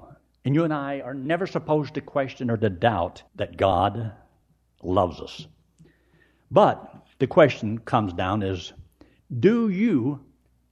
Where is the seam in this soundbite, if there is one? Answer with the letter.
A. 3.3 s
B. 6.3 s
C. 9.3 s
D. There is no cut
A